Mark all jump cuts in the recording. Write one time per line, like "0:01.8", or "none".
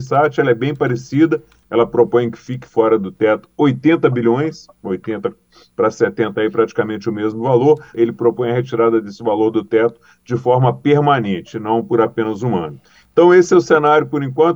0:07.9